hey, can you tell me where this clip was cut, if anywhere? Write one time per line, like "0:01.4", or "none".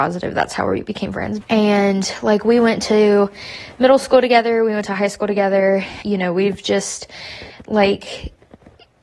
0:01.4
0:06.0